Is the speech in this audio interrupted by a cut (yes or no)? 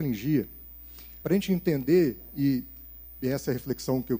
yes